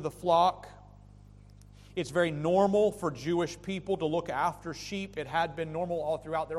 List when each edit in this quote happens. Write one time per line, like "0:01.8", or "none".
none